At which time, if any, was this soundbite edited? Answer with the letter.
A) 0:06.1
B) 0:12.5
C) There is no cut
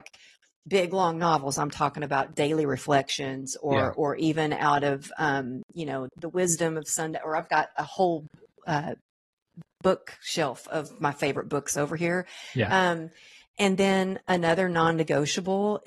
A